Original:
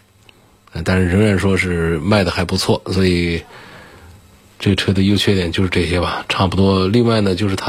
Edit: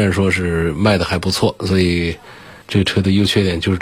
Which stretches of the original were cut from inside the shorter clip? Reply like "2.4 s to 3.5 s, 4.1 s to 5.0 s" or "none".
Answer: 3.9 s to 4.5 s